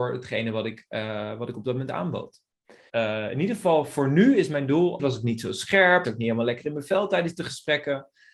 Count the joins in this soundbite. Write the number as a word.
three